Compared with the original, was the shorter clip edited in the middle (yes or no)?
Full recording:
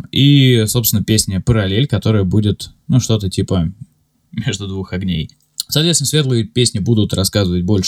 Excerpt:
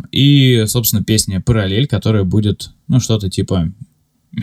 no